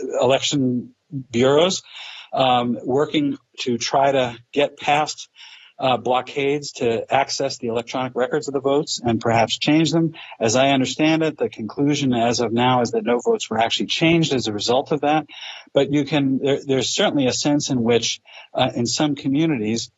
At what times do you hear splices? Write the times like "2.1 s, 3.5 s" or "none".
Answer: none